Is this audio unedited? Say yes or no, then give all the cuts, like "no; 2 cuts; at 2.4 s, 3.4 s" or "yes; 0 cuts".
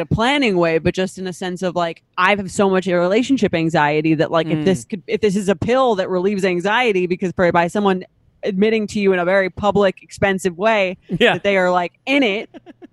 yes; 0 cuts